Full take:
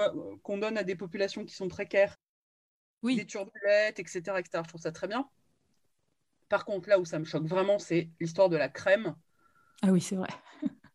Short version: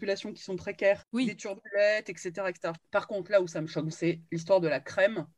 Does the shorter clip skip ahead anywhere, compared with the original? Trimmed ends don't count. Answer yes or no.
yes